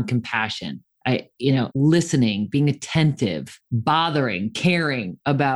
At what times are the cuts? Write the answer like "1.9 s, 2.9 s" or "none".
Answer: 1.7 s

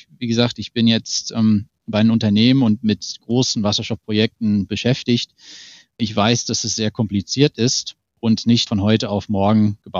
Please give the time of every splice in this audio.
8.7 s

